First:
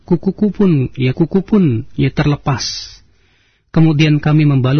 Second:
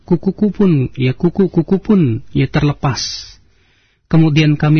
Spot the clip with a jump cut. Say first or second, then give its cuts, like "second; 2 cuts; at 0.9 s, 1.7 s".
first; 1 cut; at 1.1 s